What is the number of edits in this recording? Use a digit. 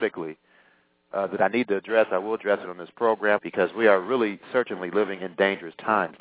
1